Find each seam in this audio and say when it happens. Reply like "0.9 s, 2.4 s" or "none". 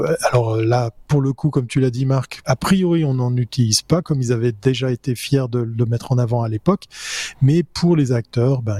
2.4 s